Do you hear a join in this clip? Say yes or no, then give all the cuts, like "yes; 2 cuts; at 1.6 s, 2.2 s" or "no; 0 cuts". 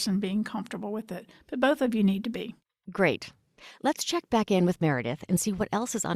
no; 0 cuts